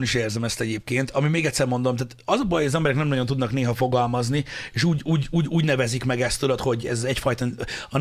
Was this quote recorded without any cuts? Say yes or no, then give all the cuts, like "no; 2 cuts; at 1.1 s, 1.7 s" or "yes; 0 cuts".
yes; 0 cuts